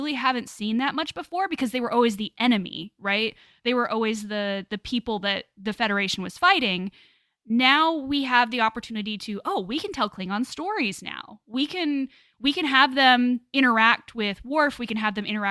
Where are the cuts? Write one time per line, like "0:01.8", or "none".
none